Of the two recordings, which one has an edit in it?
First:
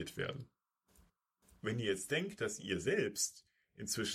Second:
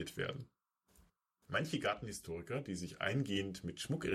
second; 1 cut; at 1.4 s

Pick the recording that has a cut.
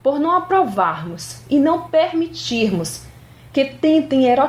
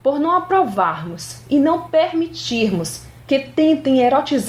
second; 1 cut; at 3.2 s

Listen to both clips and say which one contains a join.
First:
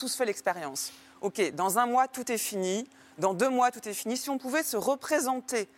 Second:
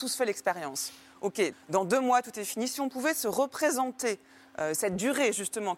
second; 1 cut; at 1.5 s

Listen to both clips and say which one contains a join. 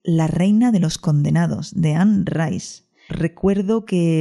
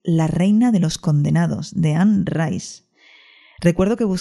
first; 1 cut; at 3.1 s

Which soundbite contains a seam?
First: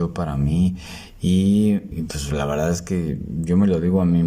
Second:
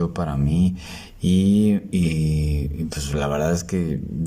first; 1 cut; at 1.9 s

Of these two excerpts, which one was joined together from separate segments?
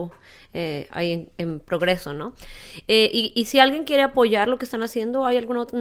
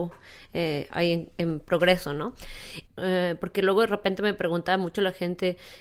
second; 1 cut; at 2.9 s

